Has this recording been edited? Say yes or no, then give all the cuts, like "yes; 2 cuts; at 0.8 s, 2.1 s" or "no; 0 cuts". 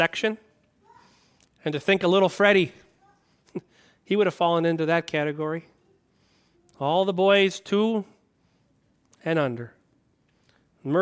no; 0 cuts